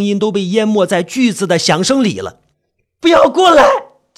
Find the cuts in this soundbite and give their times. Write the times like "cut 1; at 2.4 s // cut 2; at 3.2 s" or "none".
cut 1; at 2.5 s